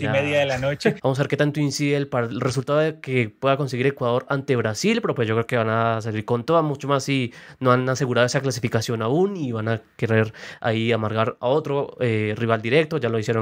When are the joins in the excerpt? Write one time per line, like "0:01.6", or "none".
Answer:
0:01.0